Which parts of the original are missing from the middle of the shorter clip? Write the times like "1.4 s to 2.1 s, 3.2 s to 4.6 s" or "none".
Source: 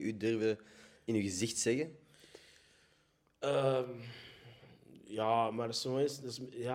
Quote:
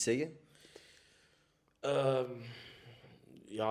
none